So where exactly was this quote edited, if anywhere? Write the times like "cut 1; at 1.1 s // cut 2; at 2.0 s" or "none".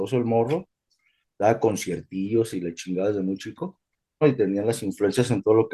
cut 1; at 4.2 s